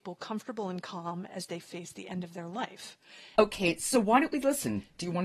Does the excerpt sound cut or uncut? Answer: cut